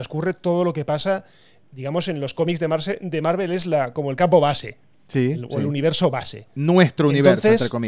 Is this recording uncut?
yes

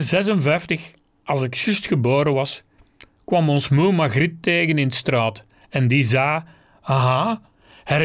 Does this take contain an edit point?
no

